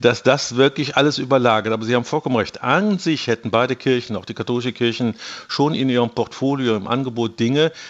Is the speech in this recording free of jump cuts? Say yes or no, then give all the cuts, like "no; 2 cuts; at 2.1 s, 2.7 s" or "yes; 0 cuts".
yes; 0 cuts